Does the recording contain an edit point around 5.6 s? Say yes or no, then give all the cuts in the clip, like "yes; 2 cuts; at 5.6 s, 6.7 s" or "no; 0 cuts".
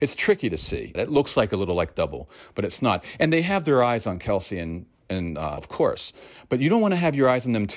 yes; 2 cuts; at 0.9 s, 5.6 s